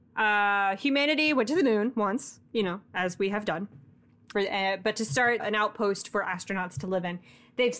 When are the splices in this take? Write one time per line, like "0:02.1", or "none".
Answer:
0:04.3
0:05.4